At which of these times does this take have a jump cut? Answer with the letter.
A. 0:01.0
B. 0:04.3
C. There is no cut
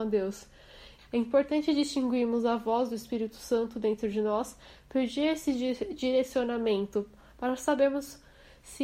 A